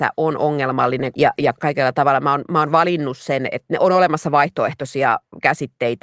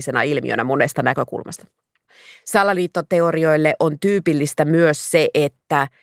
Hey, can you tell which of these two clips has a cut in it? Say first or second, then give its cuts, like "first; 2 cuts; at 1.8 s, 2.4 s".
first; 1 cut; at 1.1 s